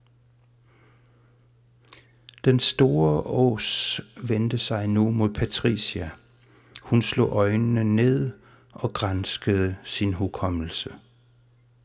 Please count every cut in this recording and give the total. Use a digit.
0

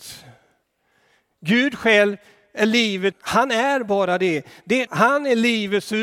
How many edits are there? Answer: 2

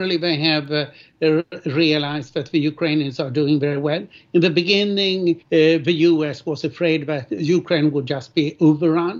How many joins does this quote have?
1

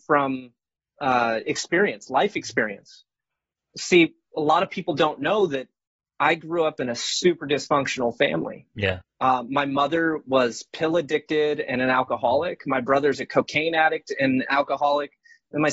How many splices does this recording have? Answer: 1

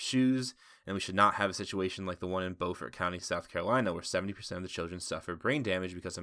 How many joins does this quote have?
0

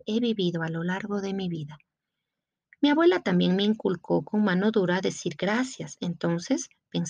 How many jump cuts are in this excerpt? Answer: 0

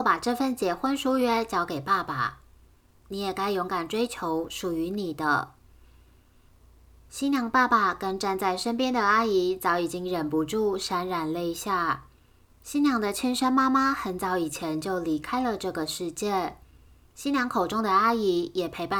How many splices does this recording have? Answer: 1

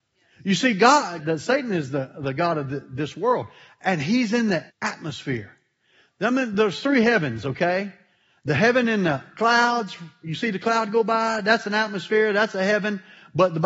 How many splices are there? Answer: 2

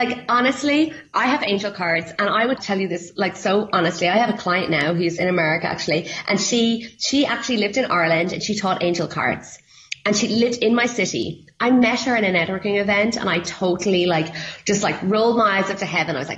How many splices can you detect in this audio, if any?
1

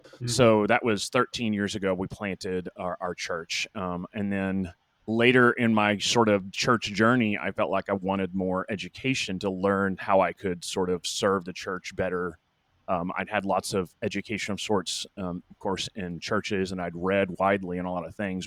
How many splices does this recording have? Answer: 0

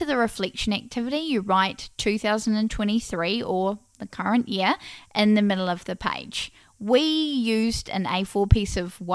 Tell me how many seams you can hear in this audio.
0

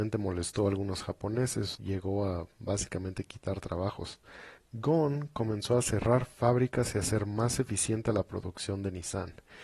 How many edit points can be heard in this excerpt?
2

